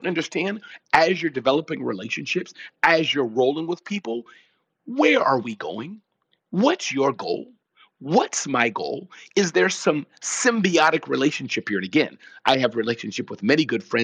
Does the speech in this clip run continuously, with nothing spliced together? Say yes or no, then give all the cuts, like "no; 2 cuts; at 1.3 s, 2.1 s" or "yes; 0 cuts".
yes; 0 cuts